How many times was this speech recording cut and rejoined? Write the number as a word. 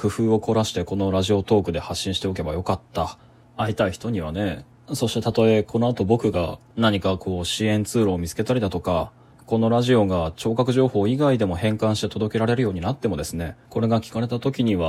three